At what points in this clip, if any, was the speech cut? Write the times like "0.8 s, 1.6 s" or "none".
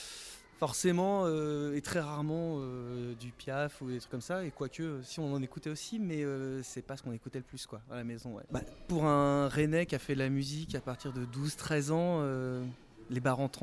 8.5 s